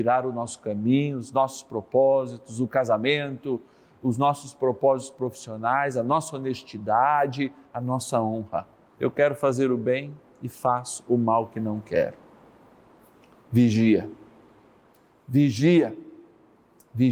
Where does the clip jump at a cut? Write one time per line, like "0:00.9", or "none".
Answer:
0:08.9